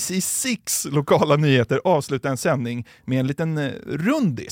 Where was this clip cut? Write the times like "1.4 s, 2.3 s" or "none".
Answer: none